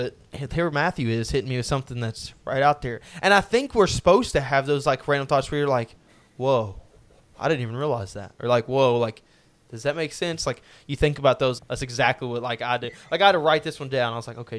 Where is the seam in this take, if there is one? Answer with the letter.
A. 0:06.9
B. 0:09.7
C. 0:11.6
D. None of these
C